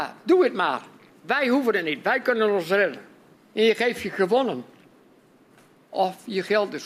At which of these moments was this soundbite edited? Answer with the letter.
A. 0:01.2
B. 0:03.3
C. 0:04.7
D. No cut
B